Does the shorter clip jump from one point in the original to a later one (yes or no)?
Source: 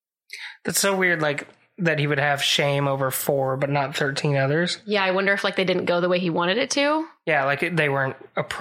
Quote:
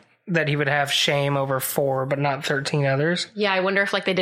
no